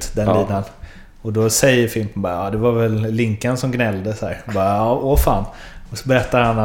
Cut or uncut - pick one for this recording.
uncut